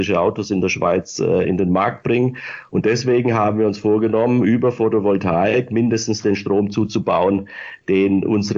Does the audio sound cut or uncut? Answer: cut